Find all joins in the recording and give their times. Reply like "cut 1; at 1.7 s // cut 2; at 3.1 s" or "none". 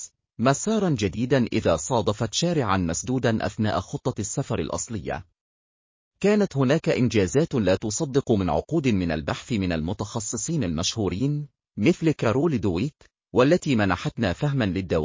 none